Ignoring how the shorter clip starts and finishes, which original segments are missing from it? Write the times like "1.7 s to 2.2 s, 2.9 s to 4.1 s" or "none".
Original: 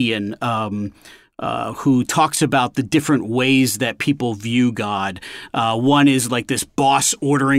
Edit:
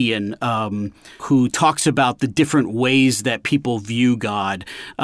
1.2 s to 1.8 s

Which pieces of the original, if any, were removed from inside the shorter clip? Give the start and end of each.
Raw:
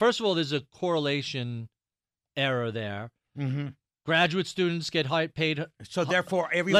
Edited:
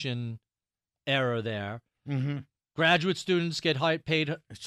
none

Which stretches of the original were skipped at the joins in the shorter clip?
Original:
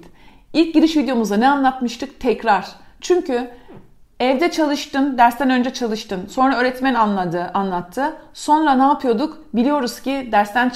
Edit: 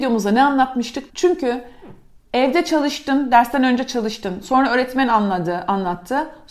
2.1 s to 3.0 s

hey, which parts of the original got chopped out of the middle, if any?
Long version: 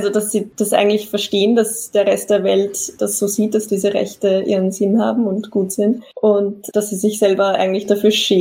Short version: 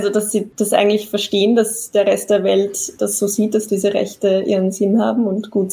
none

